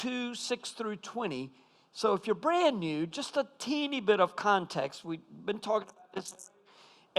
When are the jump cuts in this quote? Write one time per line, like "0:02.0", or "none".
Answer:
none

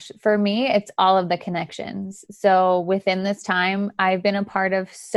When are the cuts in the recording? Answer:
none

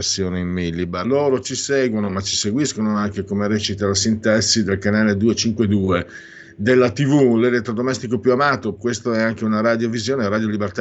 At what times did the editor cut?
0:01.0
0:08.8

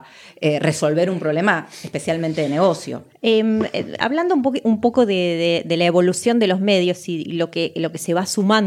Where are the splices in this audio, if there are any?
none

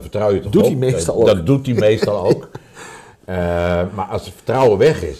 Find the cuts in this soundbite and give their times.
none

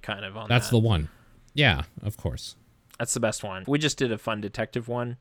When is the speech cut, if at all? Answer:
0:03.6

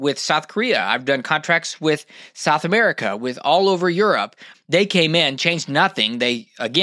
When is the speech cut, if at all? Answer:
0:04.5

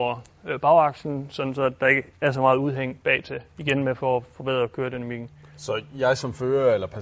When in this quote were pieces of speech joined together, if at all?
none

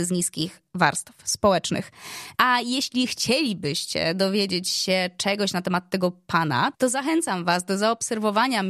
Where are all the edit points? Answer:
0:02.3
0:06.7

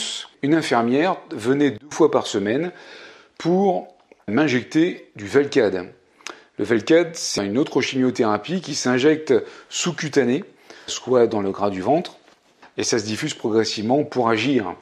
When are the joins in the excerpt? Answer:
0:04.3
0:10.9

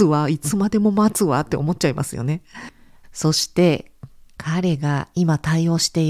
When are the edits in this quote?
0:03.0

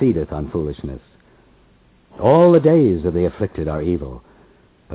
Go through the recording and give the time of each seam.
none

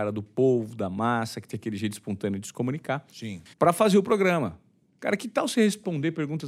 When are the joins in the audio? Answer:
0:03.5

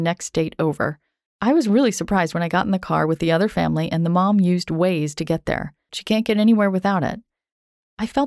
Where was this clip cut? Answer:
0:01.3
0:05.9

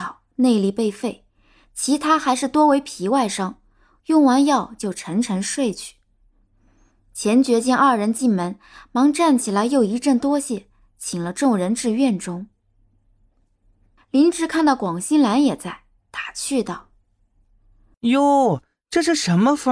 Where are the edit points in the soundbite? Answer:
none

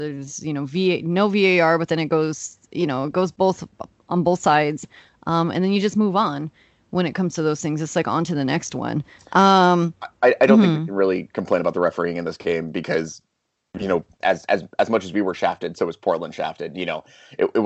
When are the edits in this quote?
0:14.2

